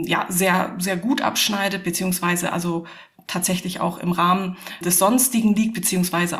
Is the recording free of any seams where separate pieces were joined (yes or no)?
no